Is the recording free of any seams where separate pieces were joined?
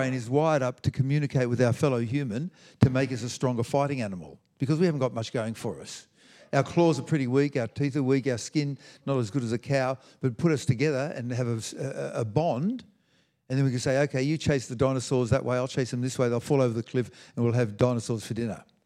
yes; 0 cuts

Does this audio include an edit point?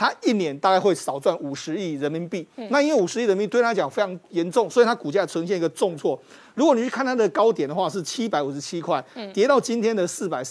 no; 0 cuts

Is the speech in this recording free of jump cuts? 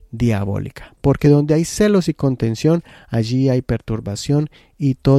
yes; 0 cuts

